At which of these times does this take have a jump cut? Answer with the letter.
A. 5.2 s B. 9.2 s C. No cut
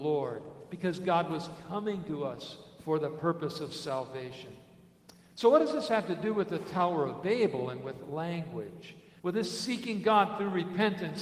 B